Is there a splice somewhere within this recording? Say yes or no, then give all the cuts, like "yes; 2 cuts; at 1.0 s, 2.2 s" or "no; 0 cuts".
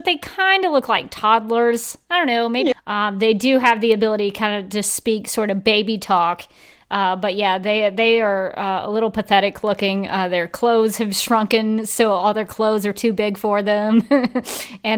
yes; 1 cut; at 2.7 s